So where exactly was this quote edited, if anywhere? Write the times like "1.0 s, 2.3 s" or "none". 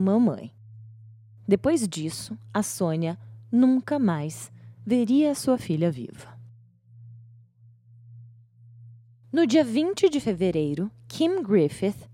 none